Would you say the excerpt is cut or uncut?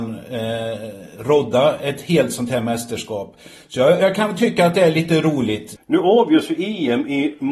cut